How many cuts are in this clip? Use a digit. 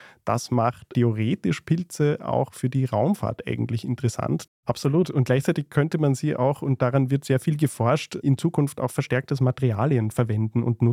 1